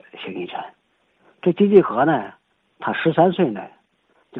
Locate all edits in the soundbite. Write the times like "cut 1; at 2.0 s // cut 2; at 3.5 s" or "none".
cut 1; at 2.6 s